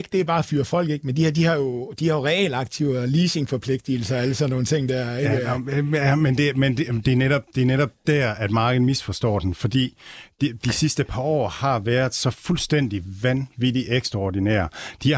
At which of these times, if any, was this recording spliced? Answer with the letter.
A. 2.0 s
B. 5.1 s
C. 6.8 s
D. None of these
D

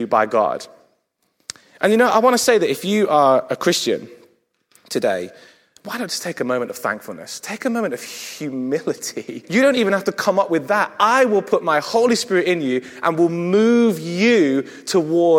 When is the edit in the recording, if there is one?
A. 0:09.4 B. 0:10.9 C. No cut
A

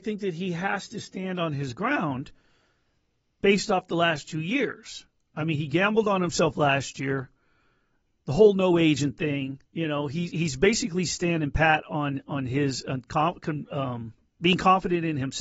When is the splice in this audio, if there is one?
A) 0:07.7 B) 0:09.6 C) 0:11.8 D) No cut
B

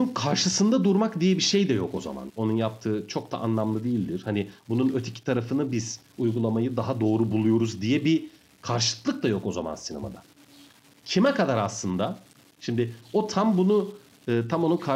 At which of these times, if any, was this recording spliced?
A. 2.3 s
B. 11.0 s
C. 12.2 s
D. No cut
A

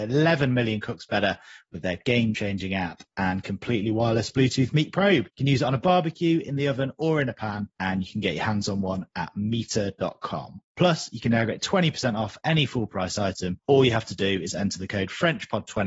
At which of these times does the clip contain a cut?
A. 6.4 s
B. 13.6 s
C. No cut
C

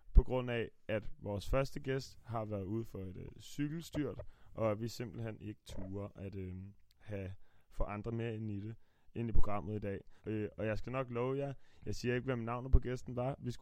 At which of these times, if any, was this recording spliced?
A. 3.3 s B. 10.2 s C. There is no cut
B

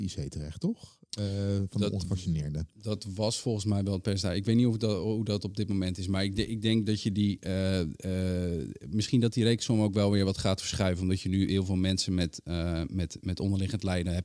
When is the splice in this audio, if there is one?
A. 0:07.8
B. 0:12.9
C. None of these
C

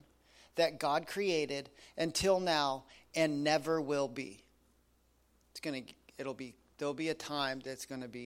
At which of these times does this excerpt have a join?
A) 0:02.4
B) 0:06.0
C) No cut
C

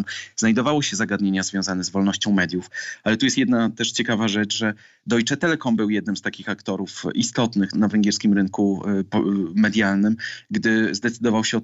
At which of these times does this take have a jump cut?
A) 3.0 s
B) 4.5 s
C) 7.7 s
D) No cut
C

